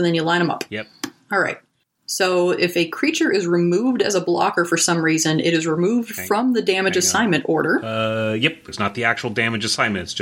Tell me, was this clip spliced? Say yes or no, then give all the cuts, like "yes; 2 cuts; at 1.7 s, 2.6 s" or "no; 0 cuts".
yes; 1 cut; at 8.7 s